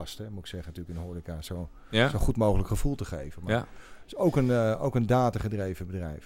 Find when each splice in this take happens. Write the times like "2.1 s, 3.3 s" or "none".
none